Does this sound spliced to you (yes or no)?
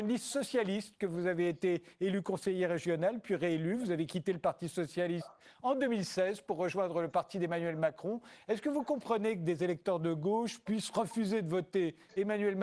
yes